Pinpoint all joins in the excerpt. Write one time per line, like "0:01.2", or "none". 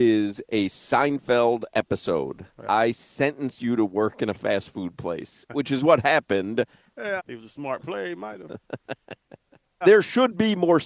0:07.2
0:09.8